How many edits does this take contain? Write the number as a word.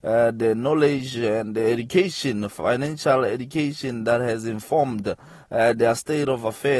zero